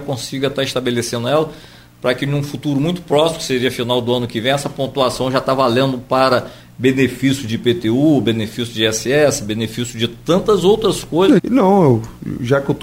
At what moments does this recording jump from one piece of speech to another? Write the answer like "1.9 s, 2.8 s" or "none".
11.4 s

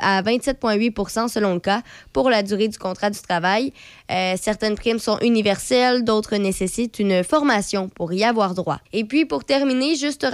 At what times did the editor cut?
8.9 s

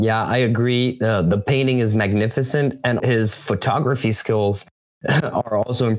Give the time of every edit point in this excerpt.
3.0 s

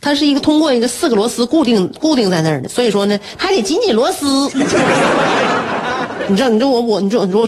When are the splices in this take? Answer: 3.4 s

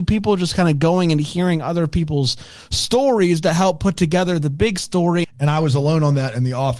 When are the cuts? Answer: 5.2 s

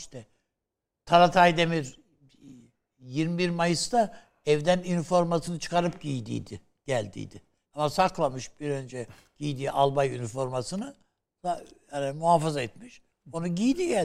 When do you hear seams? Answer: 7.6 s

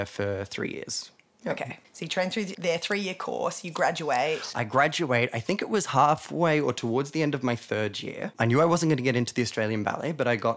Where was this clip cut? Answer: none

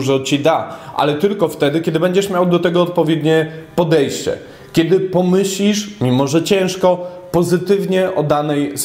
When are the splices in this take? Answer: none

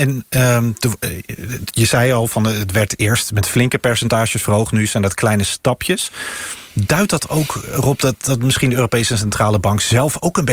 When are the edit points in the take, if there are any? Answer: none

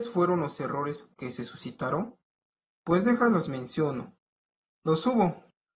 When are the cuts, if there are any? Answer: none

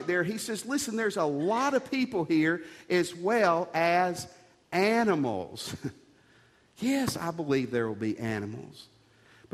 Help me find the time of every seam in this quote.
none

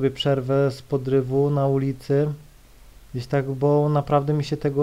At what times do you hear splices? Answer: none

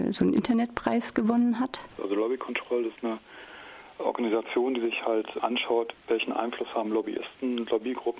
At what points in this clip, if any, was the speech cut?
2.0 s

